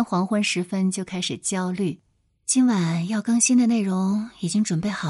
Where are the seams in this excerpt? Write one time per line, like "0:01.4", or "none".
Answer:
none